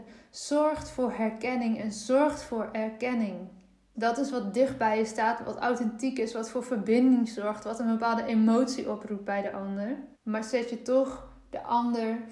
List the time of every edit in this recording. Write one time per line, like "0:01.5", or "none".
0:03.9
0:10.1